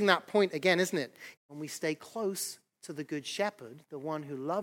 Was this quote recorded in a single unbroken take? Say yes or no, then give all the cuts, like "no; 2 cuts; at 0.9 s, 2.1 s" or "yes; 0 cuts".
no; 1 cut; at 1.3 s